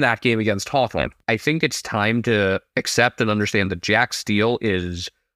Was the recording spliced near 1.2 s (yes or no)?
yes